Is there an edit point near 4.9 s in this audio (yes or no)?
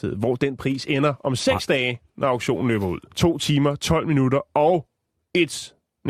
no